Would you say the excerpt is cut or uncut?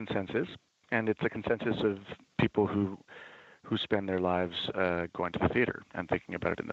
uncut